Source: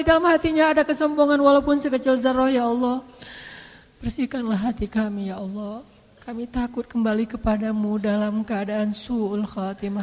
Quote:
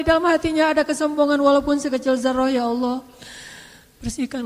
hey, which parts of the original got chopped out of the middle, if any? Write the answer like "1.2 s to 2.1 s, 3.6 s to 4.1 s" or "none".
none